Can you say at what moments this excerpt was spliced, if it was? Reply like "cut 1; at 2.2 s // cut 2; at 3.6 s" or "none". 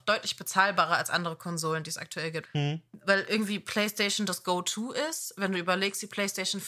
cut 1; at 2.4 s